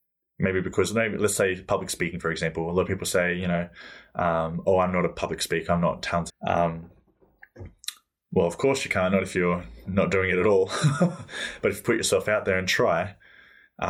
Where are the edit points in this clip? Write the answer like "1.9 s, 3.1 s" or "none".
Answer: 6.3 s